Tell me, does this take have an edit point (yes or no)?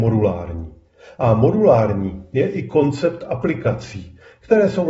no